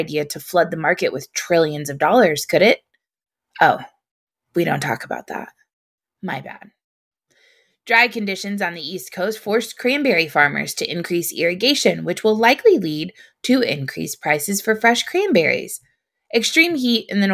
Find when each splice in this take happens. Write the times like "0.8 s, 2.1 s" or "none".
none